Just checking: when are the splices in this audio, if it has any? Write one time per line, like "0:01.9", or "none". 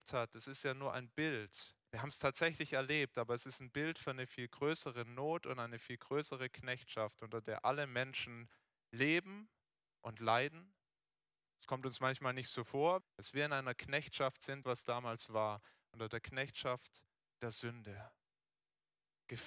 0:13.0
0:14.6